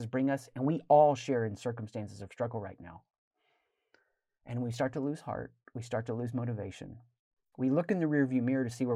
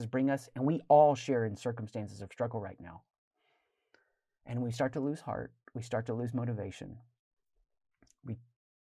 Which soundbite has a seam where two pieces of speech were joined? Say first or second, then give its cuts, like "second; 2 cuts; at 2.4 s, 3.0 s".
first; 1 cut; at 7.5 s